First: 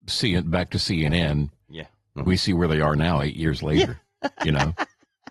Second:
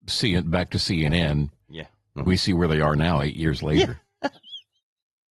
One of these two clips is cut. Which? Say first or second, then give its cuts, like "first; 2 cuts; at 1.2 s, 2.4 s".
second; 1 cut; at 4.3 s